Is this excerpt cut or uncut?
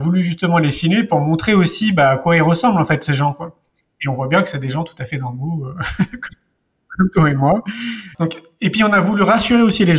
cut